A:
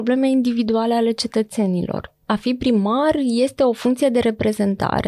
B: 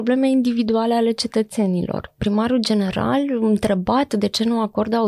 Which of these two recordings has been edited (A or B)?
B